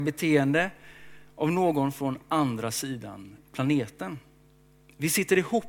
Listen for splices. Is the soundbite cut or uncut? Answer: uncut